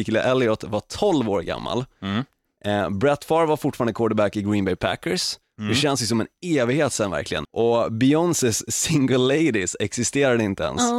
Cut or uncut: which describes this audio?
cut